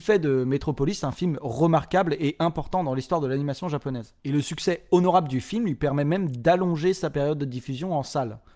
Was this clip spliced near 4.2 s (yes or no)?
yes